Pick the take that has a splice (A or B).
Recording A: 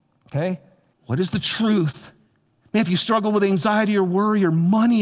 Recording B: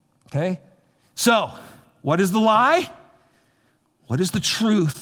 A